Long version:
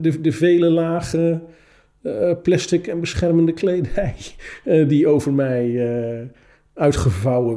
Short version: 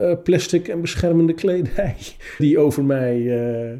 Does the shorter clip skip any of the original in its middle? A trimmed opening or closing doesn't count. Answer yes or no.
yes